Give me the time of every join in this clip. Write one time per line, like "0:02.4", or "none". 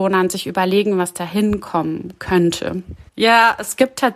0:03.1